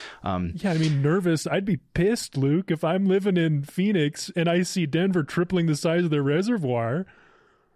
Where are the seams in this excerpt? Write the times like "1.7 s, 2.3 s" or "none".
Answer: none

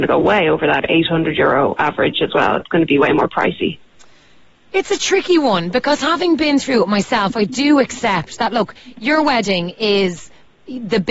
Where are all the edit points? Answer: none

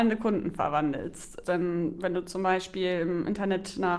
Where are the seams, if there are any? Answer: 1.4 s

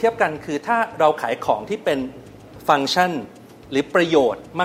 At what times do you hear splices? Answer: none

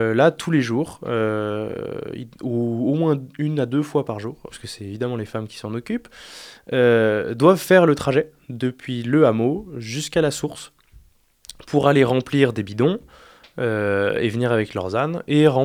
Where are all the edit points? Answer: 4.5 s

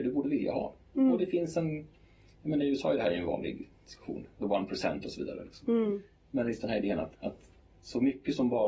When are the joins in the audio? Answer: 7.1 s

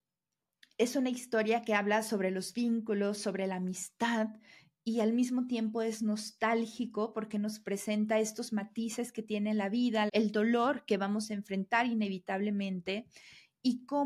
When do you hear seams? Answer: 10.1 s

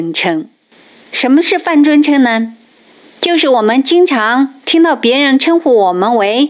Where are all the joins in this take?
none

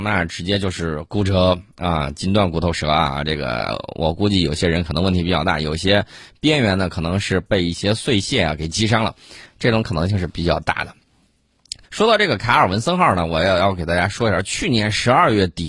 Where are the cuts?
11.8 s

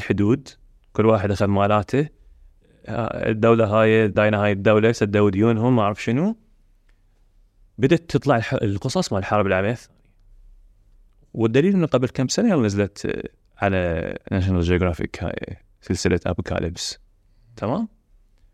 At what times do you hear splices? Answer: 4.1 s

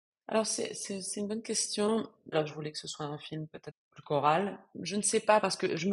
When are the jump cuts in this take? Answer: 2.3 s, 4.7 s

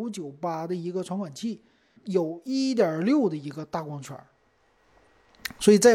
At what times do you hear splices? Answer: 2.0 s

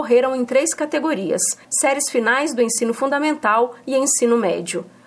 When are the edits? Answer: 1.6 s

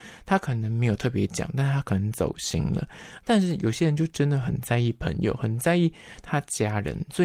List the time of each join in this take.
3.2 s

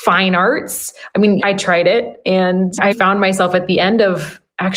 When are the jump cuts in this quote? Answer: 1.4 s, 2.9 s

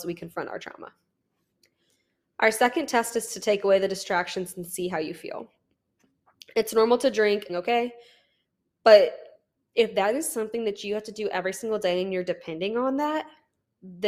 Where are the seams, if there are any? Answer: 7.5 s

